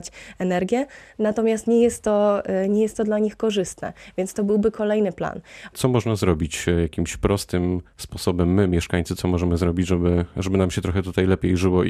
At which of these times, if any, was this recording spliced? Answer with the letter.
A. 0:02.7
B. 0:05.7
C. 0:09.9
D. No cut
B